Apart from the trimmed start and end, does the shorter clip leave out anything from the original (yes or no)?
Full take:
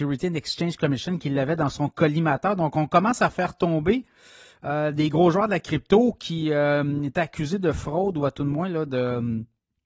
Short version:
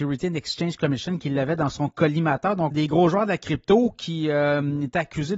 yes